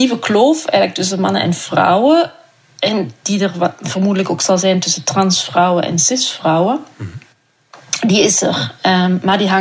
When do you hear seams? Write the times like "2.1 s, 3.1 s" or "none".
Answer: none